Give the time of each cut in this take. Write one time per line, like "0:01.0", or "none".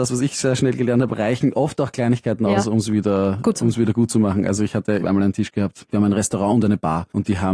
0:03.6
0:05.0

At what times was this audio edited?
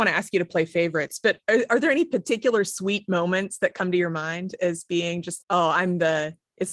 0:05.4

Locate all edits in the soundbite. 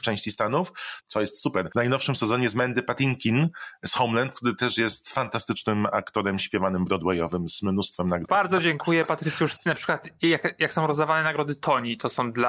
0:01.0
0:08.2
0:09.6

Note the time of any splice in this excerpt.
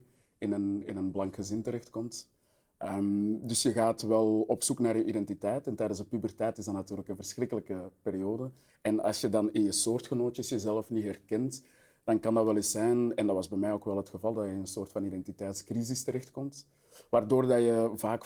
0:08.7

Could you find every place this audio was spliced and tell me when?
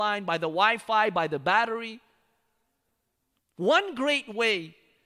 0:03.4

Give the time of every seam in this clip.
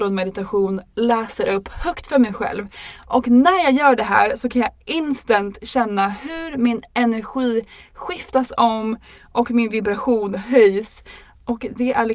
none

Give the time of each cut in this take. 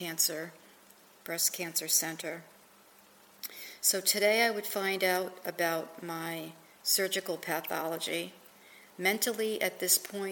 0:08.9

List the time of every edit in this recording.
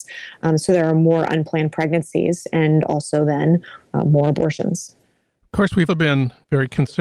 0:05.9

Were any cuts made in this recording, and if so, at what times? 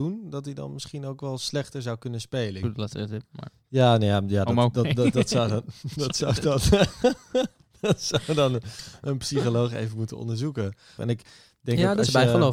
0:02.6
0:11.0

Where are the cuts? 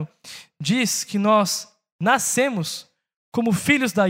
none

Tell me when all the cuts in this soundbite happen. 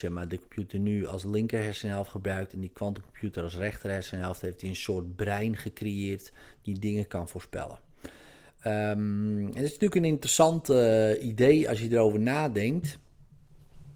none

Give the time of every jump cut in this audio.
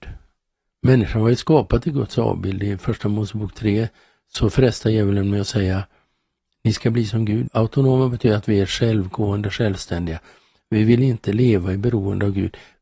0:07.5

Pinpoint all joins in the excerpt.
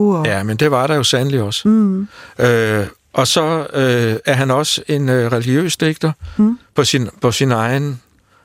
none

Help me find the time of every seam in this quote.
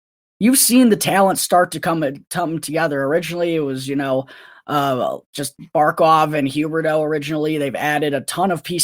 none

